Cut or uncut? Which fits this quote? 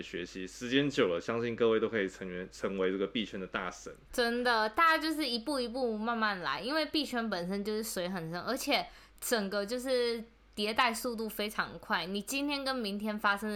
uncut